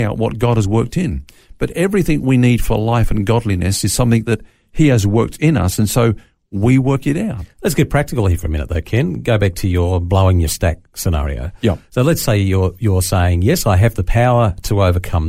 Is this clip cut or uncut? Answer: uncut